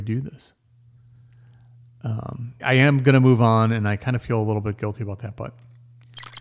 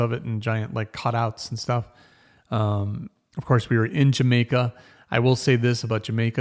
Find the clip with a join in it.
first; 1 cut; at 2.6 s

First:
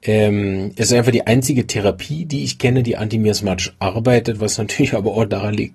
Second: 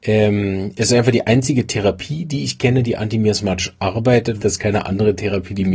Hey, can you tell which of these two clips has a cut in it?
second; 1 cut; at 4.4 s

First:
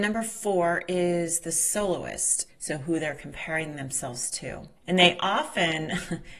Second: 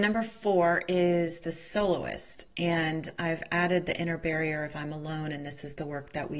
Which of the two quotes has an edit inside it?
first; 2 cuts; at 2.5 s, 4.8 s

